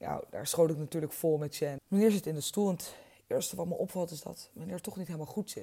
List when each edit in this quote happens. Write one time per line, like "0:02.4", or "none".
0:01.8